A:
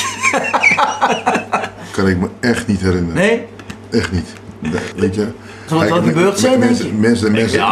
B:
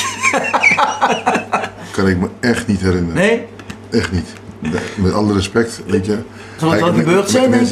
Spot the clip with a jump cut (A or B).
A